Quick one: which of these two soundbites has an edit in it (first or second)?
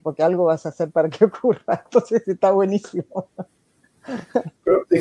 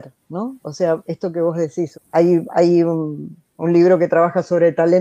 second